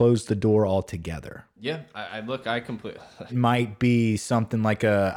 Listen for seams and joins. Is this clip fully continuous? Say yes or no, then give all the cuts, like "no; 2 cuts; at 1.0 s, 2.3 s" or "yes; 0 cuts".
no; 1 cut; at 3.3 s